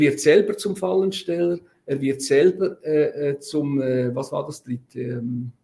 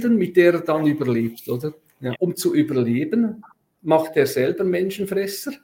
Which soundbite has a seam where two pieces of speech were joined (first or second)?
second